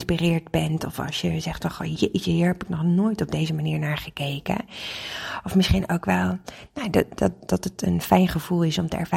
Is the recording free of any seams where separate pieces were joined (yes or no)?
yes